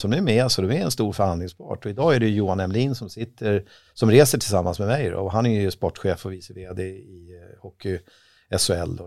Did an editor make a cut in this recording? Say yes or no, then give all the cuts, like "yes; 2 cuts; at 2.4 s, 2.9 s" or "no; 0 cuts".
no; 0 cuts